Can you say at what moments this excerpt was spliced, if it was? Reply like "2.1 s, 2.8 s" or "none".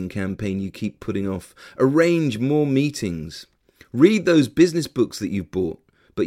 none